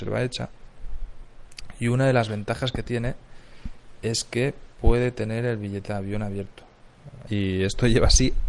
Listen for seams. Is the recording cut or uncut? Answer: cut